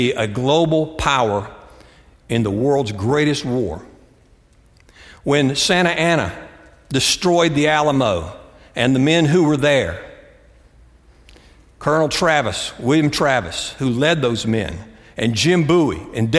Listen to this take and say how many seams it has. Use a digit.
0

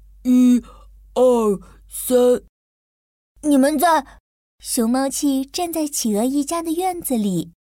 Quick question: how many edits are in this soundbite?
1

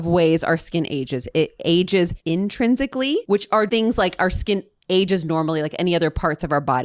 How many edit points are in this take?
1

